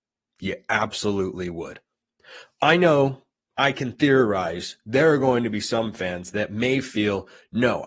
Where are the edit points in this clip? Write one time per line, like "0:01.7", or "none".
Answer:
none

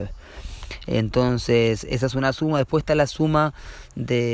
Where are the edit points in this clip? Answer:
none

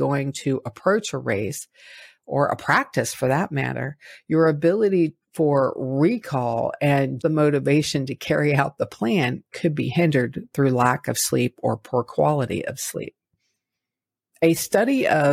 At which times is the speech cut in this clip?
0:07.2

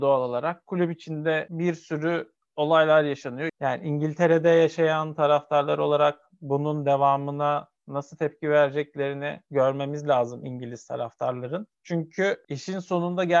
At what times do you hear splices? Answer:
0:03.5

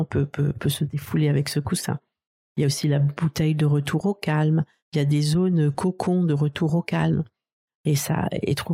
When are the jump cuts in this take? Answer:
0:04.8
0:07.7

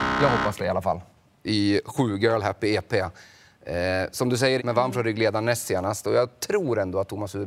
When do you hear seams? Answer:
0:04.6

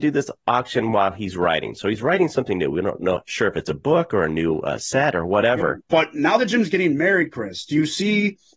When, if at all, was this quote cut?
0:05.8

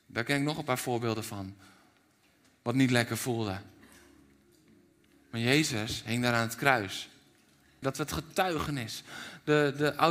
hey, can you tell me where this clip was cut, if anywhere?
0:07.8

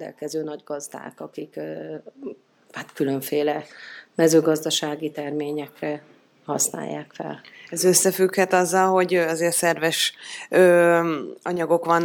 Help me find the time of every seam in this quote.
none

